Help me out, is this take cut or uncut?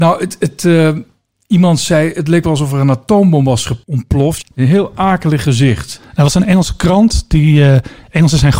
cut